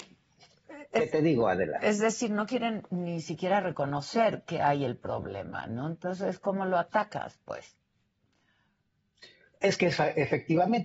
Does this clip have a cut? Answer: no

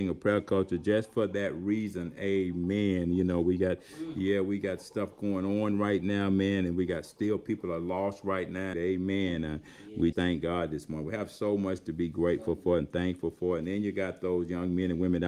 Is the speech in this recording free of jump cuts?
no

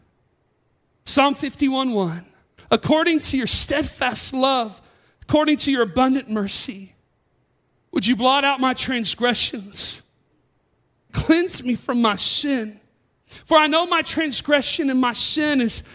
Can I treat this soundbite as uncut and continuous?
no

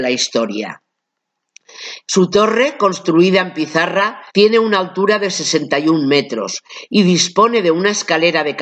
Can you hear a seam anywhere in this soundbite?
yes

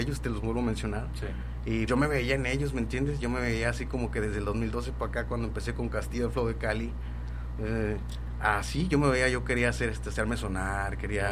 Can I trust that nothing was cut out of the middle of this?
no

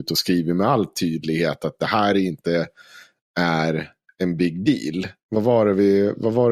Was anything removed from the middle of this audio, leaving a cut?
no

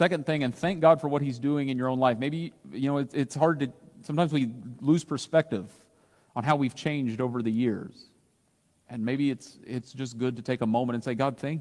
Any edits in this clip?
no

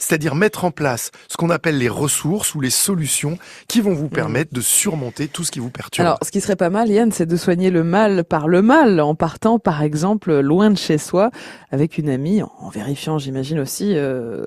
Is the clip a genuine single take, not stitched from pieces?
yes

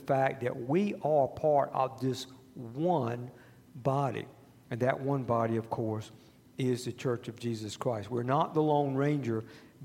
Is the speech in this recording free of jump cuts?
yes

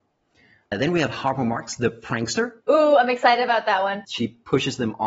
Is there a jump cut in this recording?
yes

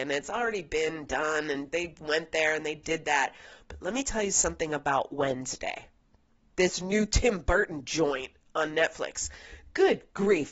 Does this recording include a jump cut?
no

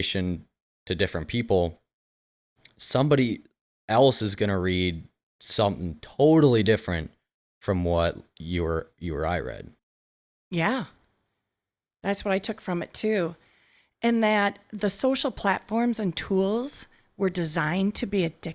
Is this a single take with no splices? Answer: yes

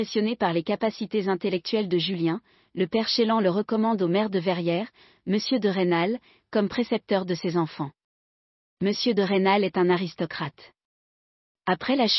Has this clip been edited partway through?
no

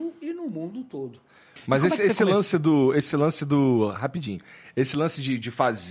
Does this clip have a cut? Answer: no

